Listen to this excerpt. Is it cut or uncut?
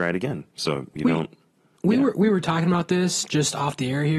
uncut